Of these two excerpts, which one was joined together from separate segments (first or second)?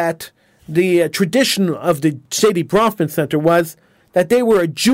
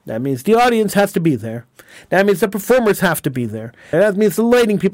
second